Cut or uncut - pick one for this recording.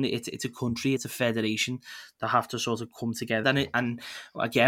cut